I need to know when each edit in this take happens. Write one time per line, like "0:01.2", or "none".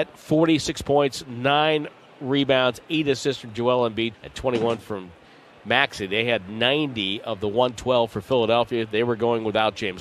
0:04.1